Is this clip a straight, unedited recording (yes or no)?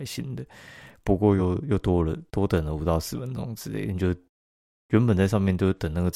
yes